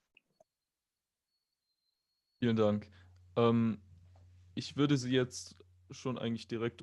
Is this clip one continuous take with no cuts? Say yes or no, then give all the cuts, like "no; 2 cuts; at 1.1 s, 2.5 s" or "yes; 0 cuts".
yes; 0 cuts